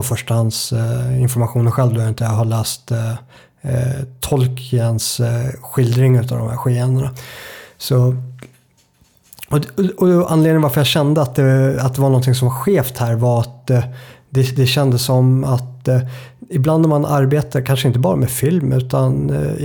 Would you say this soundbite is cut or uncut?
uncut